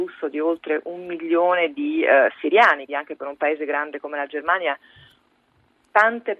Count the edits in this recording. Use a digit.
1